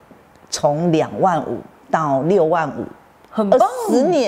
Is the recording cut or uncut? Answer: uncut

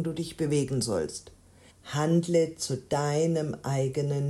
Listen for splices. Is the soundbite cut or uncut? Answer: cut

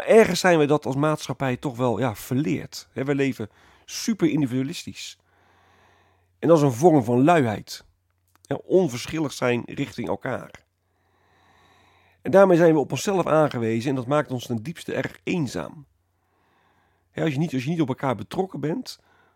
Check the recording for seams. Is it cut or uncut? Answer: uncut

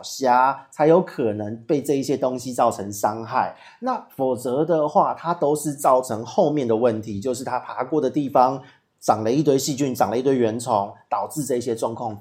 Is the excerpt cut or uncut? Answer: uncut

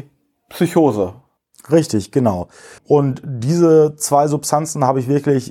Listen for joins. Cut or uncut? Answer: cut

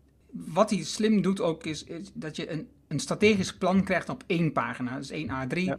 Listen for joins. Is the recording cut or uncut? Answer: uncut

